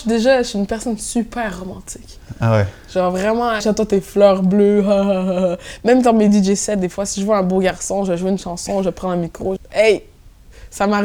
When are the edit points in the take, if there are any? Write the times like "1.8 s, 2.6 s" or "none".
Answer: 3.6 s, 9.6 s